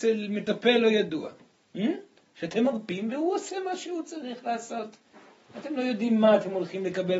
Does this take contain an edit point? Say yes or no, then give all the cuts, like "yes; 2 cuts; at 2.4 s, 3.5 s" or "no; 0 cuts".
no; 0 cuts